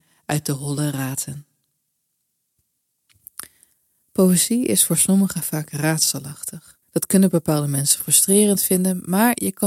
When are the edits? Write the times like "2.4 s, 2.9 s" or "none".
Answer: 6.8 s